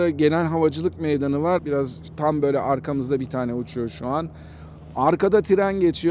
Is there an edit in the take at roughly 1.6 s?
yes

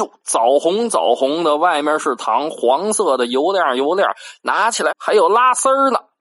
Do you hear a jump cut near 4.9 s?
yes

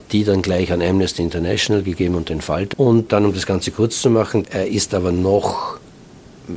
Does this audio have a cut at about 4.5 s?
no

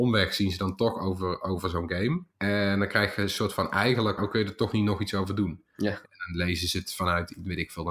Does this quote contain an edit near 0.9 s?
no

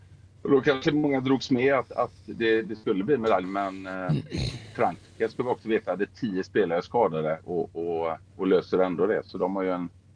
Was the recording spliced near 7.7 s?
no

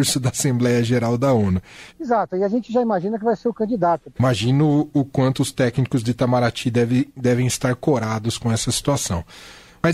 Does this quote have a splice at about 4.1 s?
yes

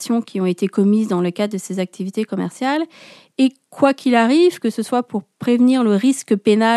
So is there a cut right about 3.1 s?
no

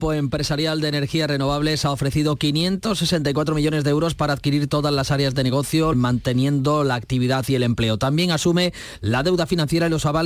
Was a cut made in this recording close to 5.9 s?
yes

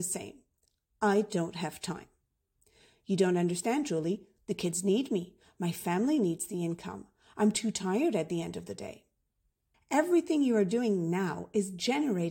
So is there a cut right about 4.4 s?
yes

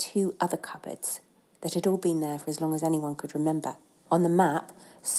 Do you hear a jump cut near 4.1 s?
yes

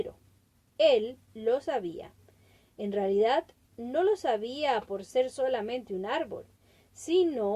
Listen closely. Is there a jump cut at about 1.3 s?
yes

